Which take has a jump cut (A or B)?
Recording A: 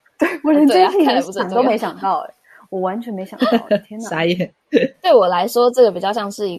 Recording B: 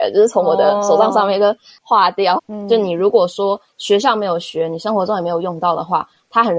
B